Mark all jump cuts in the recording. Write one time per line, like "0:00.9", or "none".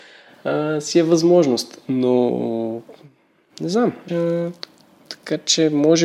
0:04.1